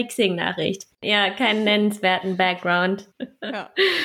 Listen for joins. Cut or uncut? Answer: cut